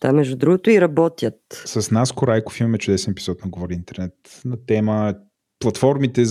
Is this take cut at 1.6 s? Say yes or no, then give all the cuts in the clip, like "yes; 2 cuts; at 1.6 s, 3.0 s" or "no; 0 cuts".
no; 0 cuts